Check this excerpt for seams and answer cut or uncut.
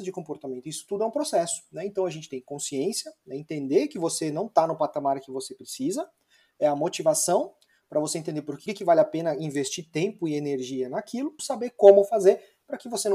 cut